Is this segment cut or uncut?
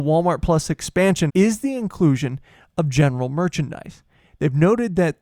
cut